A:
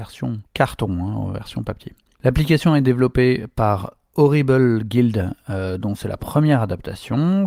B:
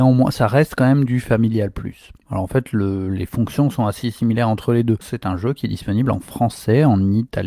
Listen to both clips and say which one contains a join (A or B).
B